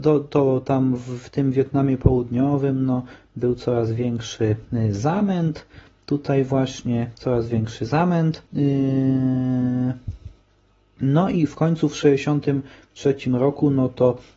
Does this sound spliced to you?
yes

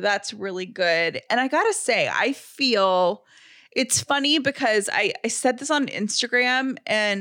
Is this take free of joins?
yes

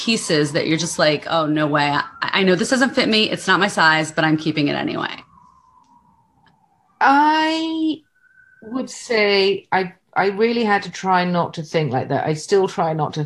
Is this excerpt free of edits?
yes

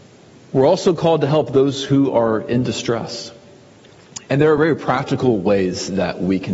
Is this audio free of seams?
yes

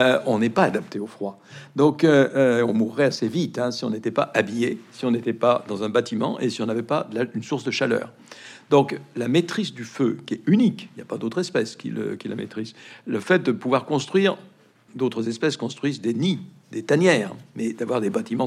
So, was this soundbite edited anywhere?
yes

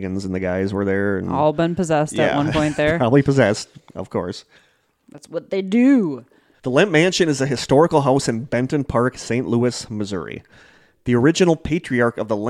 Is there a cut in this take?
no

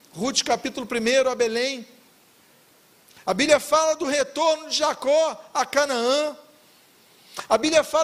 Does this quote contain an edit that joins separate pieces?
no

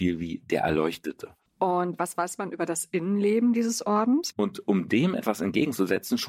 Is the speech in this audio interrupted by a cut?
yes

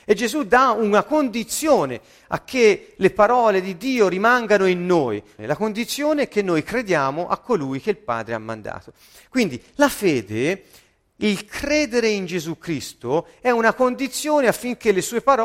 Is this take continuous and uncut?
no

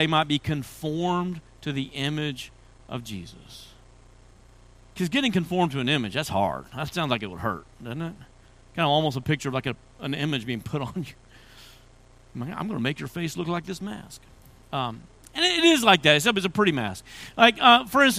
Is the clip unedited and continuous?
yes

